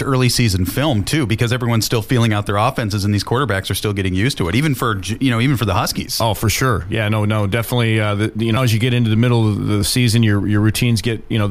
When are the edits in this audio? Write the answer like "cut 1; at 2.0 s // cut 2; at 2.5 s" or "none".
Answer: cut 1; at 8.6 s